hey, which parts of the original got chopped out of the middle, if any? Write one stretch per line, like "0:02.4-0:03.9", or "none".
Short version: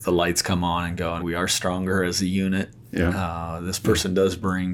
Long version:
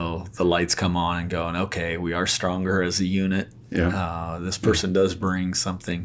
0:01.5-0:02.0